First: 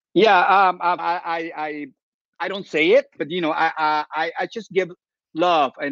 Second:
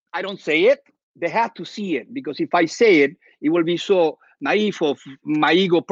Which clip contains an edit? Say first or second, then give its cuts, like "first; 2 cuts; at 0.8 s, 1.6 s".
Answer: first; 2 cuts; at 1.0 s, 3.2 s